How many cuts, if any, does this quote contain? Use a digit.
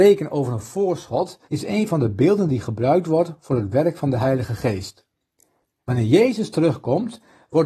2